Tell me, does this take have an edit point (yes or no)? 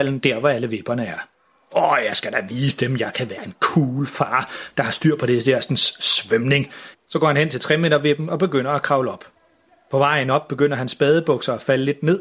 yes